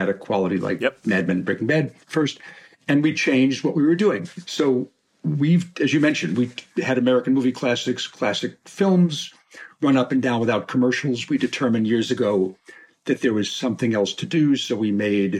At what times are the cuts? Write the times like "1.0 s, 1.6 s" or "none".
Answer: 4.4 s